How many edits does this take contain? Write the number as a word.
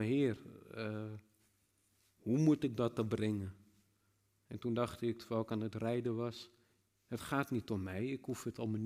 zero